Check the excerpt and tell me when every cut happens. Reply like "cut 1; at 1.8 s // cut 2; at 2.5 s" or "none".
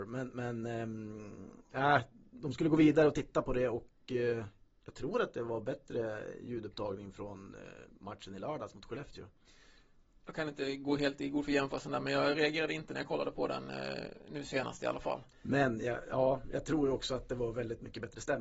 none